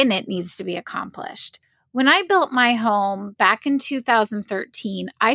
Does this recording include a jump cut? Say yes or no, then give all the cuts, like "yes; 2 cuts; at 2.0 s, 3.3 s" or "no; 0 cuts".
no; 0 cuts